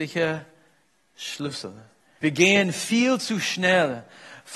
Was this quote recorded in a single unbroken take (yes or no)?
no